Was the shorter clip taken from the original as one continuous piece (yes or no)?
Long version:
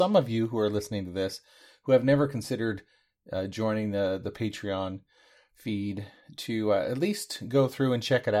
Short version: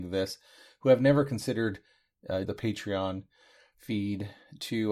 no